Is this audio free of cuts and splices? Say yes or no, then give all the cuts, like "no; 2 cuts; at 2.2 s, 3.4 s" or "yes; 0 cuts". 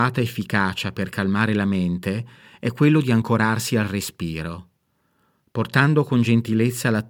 yes; 0 cuts